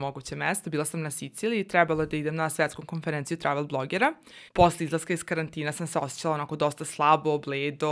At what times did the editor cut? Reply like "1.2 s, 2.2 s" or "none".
4.5 s